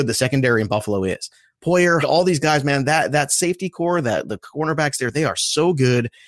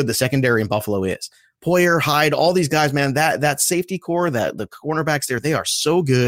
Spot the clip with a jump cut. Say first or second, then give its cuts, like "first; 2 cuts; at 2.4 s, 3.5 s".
first; 1 cut; at 2.0 s